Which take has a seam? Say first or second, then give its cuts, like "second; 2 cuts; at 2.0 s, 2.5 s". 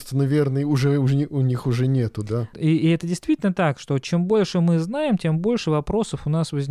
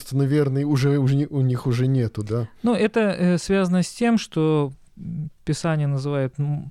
first; 1 cut; at 2.5 s